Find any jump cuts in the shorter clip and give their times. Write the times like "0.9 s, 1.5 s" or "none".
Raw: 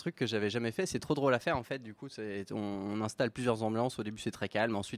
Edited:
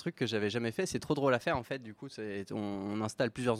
none